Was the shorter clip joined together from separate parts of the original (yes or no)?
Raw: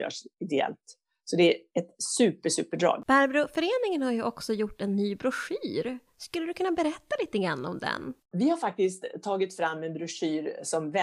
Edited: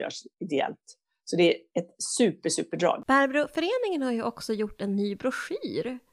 no